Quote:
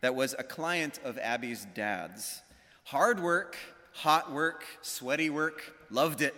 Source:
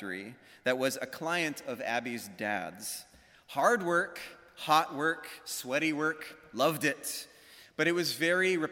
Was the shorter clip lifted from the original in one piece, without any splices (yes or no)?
yes